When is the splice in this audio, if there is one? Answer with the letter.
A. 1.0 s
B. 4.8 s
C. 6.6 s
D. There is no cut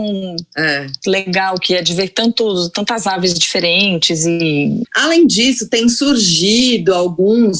B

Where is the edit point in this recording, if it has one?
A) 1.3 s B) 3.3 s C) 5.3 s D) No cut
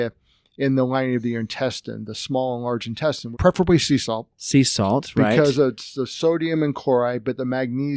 B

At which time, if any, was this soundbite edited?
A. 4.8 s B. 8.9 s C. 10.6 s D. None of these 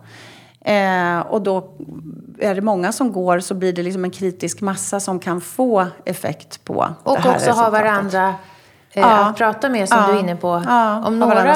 D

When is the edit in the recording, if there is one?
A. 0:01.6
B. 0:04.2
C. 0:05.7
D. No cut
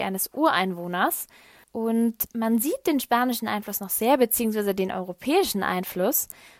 A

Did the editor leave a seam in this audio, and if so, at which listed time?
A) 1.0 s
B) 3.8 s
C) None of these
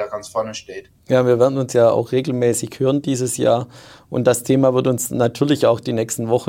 A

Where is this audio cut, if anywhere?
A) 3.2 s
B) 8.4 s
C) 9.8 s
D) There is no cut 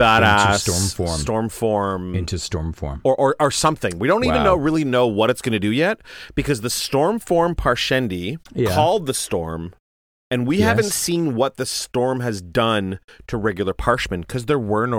B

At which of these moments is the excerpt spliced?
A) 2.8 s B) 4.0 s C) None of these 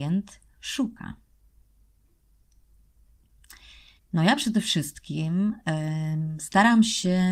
B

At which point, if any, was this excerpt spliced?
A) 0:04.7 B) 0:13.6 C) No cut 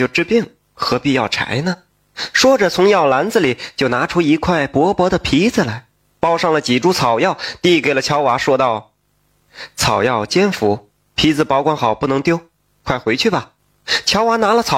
B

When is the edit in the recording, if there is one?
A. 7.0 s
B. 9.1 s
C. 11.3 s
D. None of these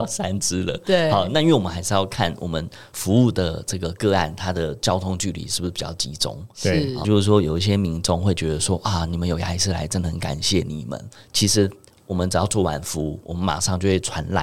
A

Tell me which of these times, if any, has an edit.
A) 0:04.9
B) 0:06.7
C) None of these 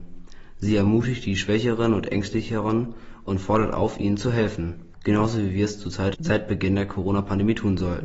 A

